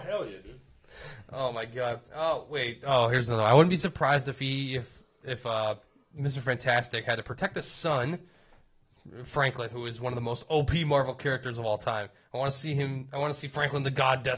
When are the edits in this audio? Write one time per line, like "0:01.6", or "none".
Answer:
0:02.1